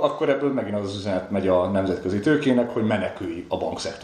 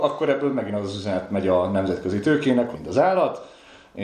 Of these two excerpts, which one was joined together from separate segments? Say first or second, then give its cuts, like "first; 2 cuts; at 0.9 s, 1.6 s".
second; 1 cut; at 2.7 s